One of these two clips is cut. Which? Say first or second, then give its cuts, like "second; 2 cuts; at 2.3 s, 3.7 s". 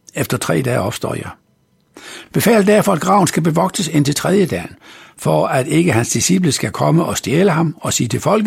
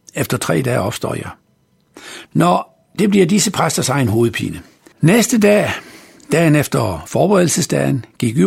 second; 2 cuts; at 2.3 s, 4.9 s